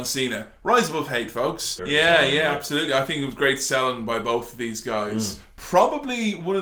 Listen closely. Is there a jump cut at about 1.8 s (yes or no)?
yes